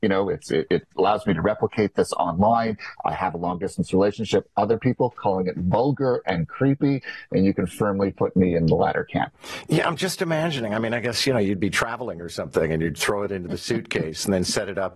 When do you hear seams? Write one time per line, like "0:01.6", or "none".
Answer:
none